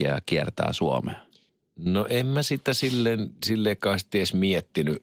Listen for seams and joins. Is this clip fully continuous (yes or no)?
yes